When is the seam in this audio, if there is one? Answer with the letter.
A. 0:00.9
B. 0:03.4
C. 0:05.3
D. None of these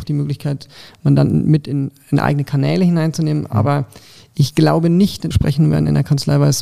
C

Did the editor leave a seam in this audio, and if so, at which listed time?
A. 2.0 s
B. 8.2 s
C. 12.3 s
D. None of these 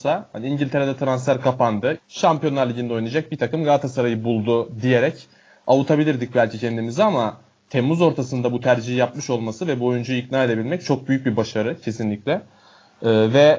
A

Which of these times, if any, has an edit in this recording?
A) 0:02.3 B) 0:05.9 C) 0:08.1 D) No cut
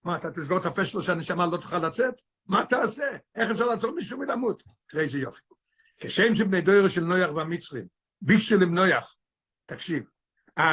D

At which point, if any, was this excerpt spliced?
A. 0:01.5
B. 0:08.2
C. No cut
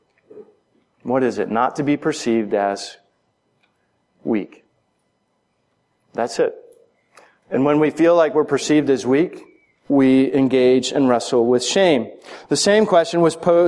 C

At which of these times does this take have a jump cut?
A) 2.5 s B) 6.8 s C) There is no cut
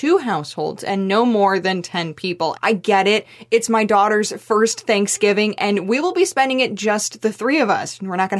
A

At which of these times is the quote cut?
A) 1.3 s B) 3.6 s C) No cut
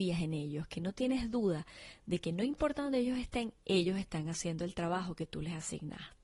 C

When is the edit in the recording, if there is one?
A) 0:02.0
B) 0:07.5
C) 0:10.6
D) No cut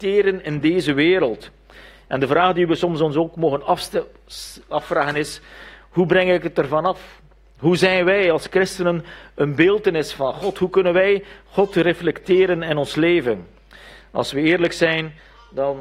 D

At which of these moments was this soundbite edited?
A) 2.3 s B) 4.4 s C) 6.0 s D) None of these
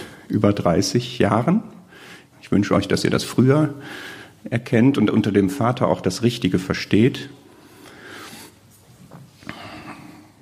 A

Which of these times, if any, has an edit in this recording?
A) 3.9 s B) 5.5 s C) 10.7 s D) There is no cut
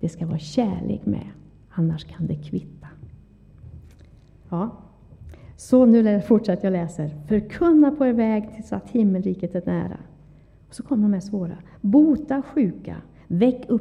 D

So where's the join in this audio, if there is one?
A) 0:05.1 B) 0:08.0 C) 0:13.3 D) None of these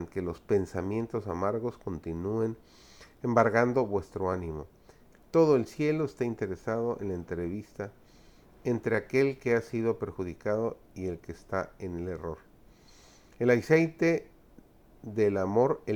A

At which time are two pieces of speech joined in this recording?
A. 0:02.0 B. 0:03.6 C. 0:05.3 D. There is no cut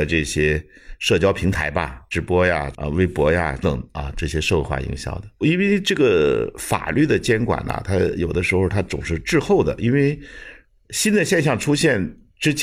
B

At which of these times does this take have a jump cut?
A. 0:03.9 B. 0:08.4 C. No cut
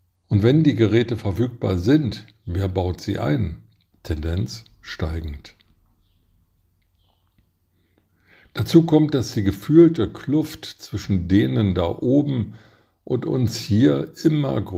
A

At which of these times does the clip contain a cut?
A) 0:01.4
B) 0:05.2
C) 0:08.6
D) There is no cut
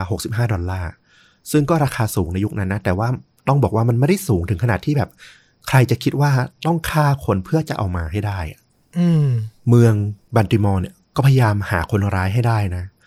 D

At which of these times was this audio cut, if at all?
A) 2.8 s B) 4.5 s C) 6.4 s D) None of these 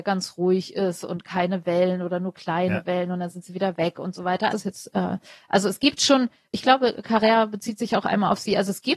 B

